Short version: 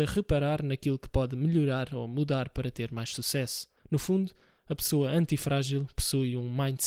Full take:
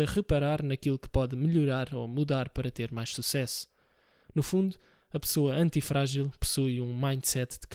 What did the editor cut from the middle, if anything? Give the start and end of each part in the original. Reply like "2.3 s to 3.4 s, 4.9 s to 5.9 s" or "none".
3.8 s to 4.2 s